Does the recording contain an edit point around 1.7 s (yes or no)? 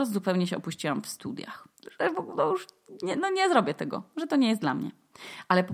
yes